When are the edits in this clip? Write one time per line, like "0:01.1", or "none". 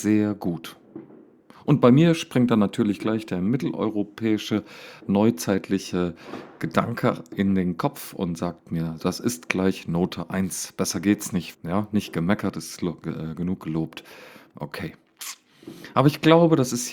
0:05.0
0:09.0
0:11.5